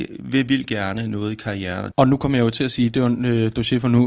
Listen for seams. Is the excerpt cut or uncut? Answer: cut